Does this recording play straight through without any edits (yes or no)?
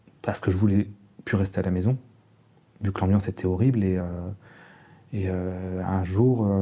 yes